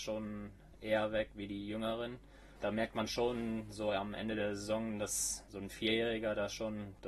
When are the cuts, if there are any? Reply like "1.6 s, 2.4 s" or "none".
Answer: 2.6 s